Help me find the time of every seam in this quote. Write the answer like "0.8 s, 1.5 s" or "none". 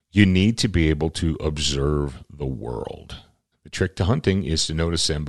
3.5 s